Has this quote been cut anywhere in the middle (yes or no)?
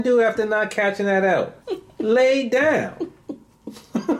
yes